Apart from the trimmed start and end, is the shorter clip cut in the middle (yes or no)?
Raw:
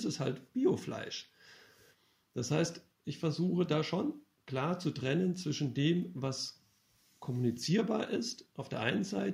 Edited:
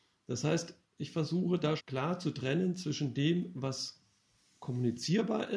yes